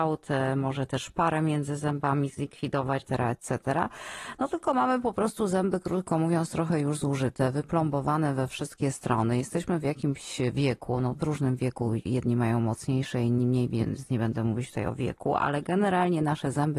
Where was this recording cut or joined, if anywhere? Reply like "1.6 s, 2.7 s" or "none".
3.0 s